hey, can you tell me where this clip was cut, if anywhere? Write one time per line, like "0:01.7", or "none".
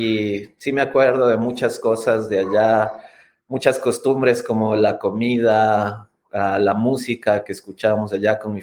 none

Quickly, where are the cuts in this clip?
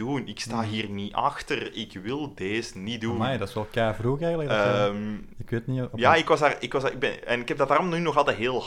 none

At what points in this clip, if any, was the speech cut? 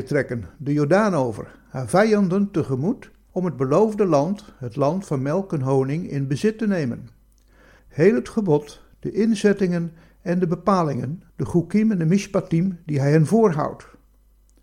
0:07.8
0:11.3

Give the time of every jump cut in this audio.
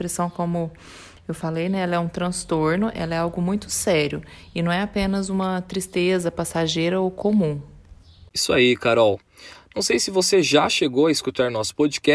none

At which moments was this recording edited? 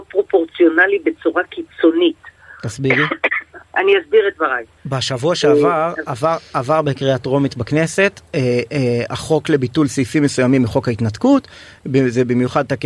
0:04.8

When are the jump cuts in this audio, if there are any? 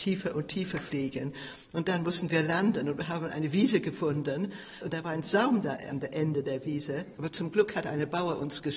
0:04.8
0:07.2

